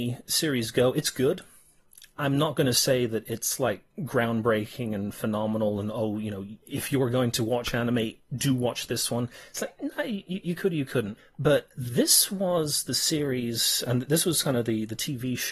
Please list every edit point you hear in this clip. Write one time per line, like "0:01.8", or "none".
none